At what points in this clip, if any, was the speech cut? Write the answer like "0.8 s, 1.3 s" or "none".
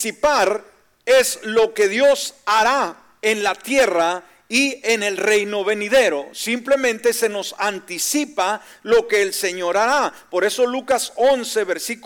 none